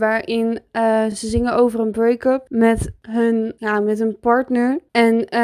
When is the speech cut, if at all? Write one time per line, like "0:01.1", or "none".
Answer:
none